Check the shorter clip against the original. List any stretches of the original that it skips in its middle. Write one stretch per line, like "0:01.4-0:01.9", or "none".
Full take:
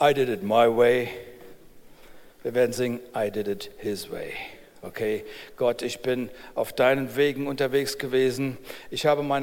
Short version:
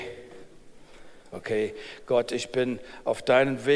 0:02.3-0:04.7